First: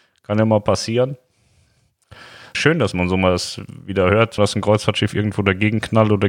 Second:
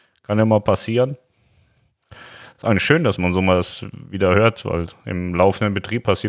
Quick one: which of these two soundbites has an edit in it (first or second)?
first